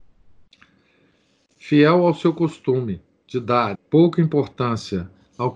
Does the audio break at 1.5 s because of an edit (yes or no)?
no